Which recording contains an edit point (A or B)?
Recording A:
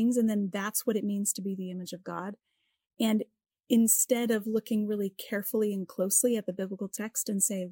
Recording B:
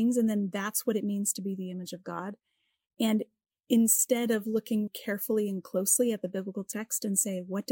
B